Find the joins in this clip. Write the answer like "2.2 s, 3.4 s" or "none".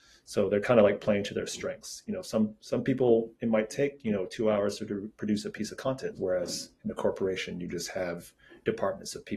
6.1 s